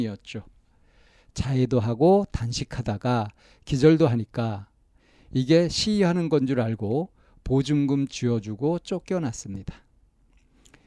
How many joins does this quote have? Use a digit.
0